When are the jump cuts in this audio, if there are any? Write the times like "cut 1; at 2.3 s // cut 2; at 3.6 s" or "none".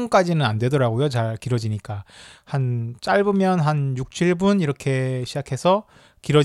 none